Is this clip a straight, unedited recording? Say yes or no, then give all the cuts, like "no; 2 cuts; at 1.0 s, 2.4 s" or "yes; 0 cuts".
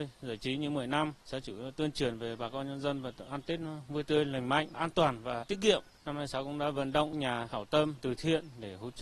yes; 0 cuts